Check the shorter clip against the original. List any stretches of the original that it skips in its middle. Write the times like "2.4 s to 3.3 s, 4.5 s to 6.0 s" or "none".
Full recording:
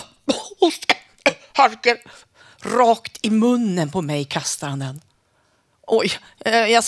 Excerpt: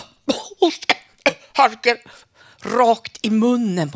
none